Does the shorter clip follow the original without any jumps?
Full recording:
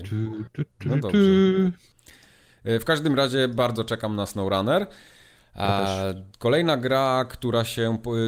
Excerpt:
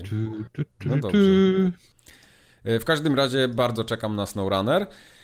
yes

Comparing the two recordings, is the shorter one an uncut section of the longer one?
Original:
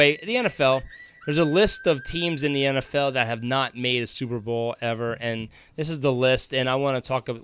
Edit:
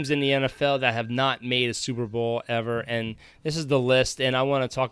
yes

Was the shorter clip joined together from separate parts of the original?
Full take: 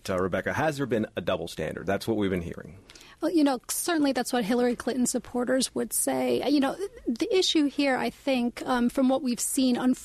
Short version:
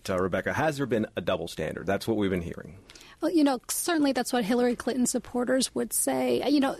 no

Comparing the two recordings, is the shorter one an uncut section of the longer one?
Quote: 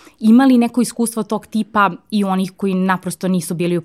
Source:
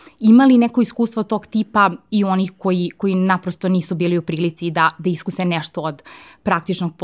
no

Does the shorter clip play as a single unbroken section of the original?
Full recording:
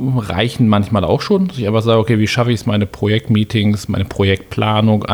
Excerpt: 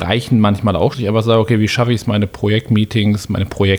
no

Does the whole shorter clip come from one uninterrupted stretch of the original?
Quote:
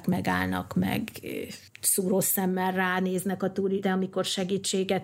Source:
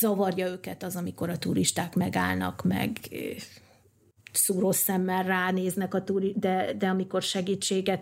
no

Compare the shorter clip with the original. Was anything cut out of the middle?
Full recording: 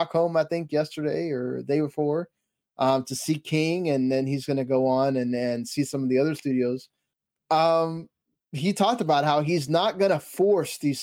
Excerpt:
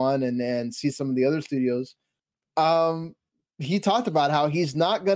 no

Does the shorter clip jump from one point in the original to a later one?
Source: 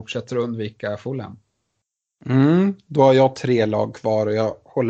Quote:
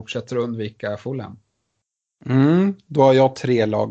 no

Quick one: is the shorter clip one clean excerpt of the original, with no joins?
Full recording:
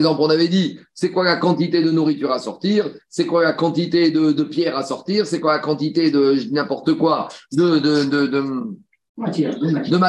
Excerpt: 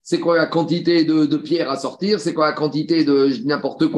yes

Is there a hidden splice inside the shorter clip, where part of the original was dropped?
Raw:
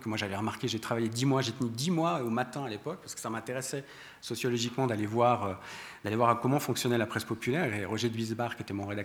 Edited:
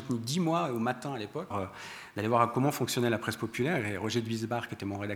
yes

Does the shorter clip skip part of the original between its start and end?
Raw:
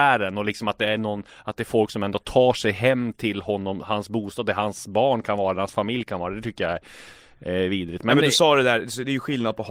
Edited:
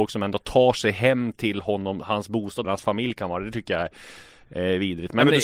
yes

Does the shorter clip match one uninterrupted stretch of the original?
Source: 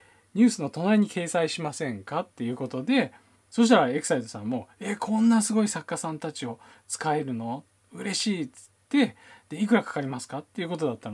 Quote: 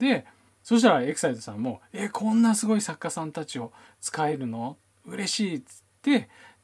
yes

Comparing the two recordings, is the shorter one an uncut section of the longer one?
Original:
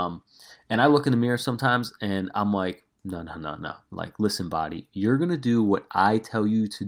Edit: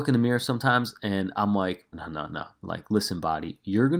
no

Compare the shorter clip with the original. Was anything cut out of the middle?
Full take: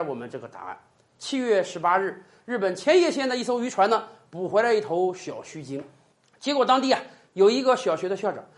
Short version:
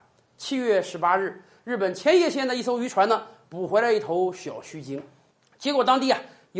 no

